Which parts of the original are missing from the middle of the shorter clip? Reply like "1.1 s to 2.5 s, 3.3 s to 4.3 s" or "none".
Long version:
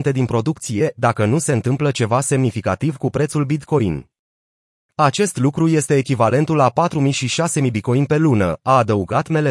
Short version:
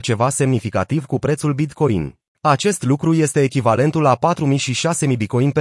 4.2 s to 4.8 s

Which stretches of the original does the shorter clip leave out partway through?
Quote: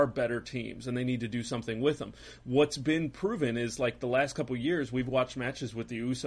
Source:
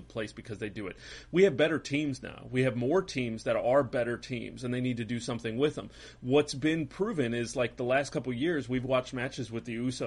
none

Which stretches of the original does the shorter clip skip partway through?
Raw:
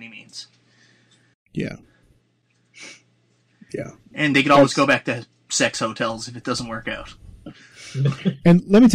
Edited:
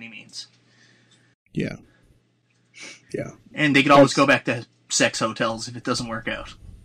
3.0 s to 3.6 s

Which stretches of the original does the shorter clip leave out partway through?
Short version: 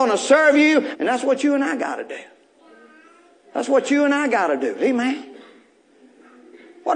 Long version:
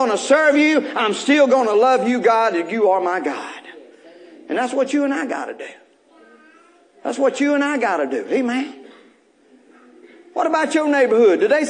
0.9 s to 4.4 s

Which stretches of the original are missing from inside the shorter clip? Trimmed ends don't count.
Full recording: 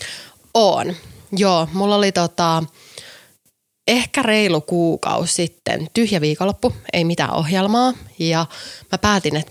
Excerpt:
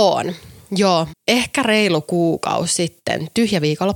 1.7 s to 3.7 s

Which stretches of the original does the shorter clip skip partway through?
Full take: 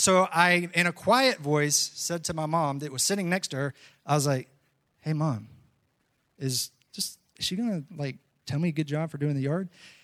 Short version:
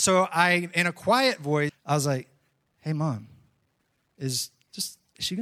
1.7 s to 3.9 s

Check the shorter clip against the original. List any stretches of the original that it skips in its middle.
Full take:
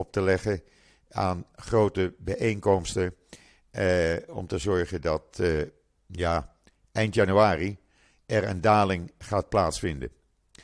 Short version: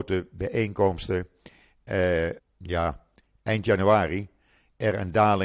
4.3 s to 5.9 s

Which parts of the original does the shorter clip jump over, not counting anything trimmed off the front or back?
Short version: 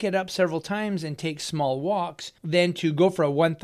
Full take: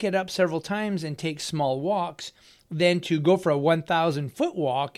2.4 s to 2.6 s

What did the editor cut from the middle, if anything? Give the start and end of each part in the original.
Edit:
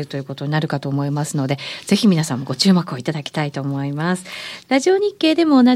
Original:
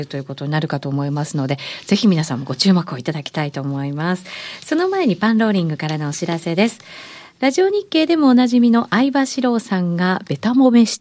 4.6 s to 7.3 s

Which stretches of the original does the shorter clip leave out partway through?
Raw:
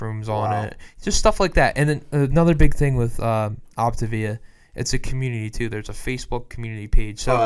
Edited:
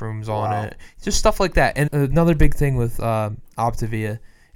1.9 s to 2.1 s

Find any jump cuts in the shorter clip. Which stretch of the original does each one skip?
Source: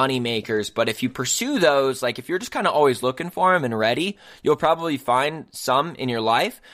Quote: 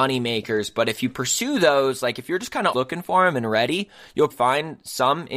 2.7 s to 3.0 s, 4.6 s to 5.0 s

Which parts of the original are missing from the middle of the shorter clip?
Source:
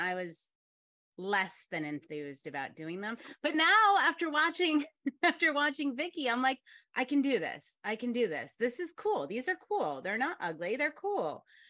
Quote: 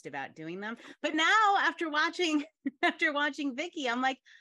none

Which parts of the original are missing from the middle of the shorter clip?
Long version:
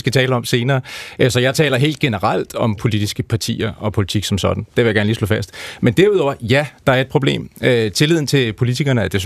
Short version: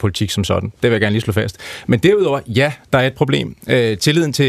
none

